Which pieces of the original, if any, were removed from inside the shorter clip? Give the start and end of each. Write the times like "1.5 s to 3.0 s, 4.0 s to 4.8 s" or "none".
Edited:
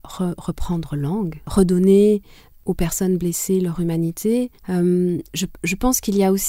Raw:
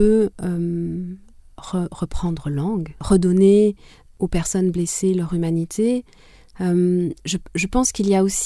6.1 s to 6.5 s

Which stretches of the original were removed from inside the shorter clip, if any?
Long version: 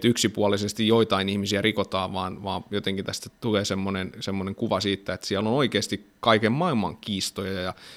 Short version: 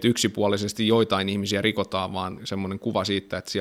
2.4 s to 4.1 s

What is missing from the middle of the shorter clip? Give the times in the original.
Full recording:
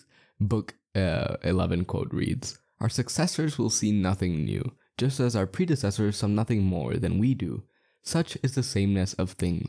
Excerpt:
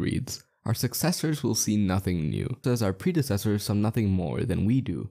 4.8 s to 5.2 s

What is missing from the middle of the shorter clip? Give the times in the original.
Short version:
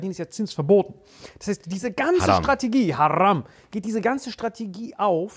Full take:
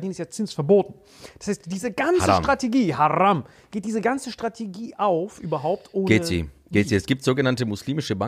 none

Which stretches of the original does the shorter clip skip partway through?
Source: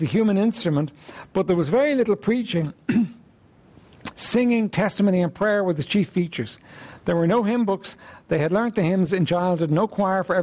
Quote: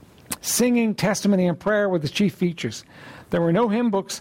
none

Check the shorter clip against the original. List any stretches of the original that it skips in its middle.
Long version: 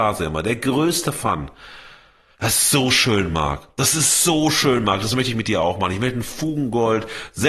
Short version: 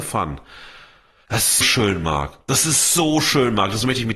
2.7 s to 2.9 s

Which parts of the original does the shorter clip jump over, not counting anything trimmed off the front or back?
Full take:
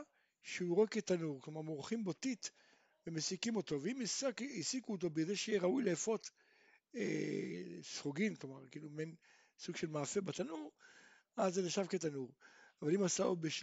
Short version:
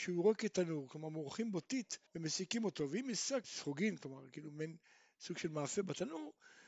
2.6 s to 3.0 s, 4.4 s to 7.8 s

